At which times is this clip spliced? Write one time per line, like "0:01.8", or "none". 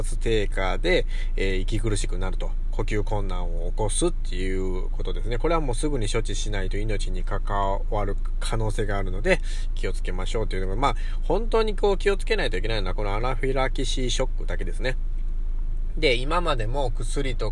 none